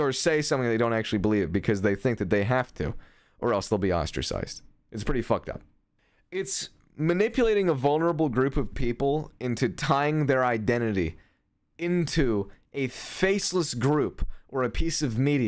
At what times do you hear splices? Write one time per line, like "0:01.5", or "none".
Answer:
none